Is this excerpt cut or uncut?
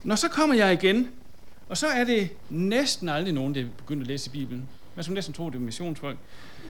uncut